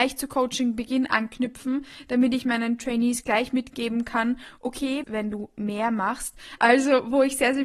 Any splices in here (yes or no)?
yes